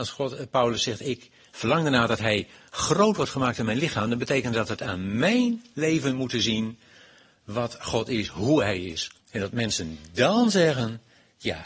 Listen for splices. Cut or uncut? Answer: cut